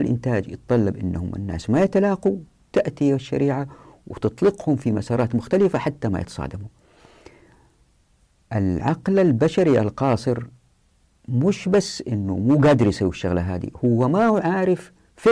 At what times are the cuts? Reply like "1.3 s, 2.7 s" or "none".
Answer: none

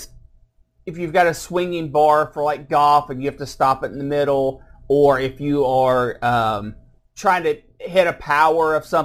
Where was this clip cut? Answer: 7.0 s

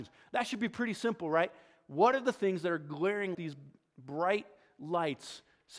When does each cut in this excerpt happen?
3.3 s

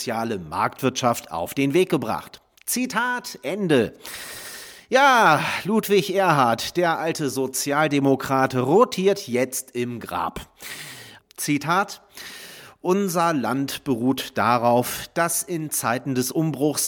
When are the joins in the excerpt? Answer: 11.2 s

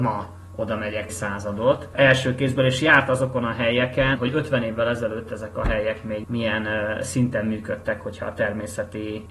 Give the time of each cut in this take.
1.1 s, 4.1 s

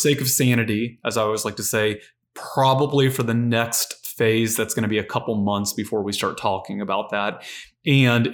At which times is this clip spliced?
none

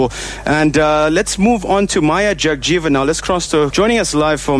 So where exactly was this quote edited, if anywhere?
3.7 s

